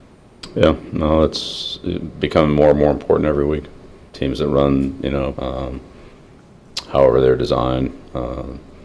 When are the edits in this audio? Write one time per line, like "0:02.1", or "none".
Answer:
0:04.1
0:05.3